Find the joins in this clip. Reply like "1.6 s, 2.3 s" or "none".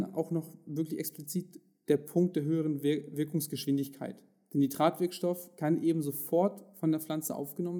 none

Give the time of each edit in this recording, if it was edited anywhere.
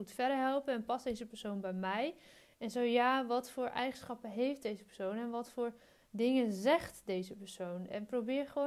none

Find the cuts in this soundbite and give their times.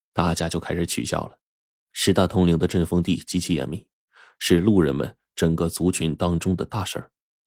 1.7 s

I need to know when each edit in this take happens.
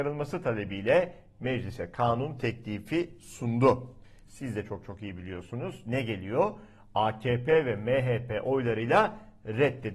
4.2 s

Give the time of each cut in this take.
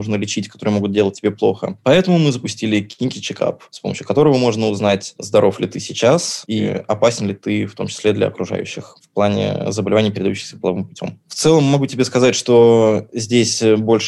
none

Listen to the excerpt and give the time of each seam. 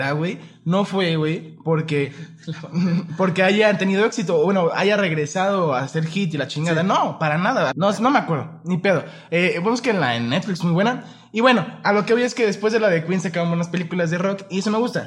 7.7 s

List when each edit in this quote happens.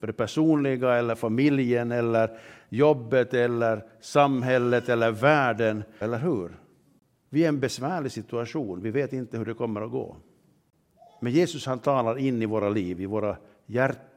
6.0 s

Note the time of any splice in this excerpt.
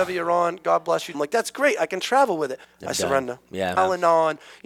1.1 s, 2.6 s, 3.8 s

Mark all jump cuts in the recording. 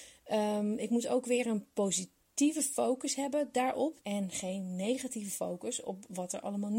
4.0 s

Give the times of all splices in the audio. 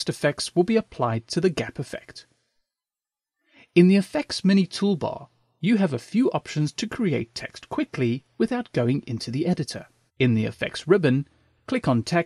10.1 s

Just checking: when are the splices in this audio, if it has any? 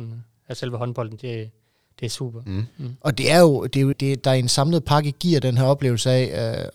1.2 s, 2.5 s, 3.9 s

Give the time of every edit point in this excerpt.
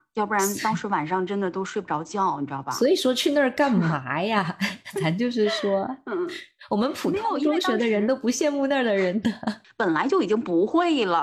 9.6 s

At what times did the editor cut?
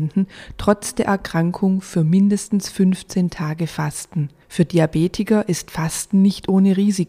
none

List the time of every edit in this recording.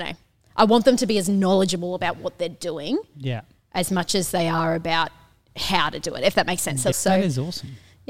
6.9 s

